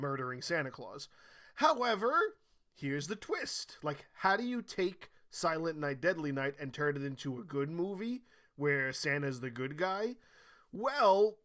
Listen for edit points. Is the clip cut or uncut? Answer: uncut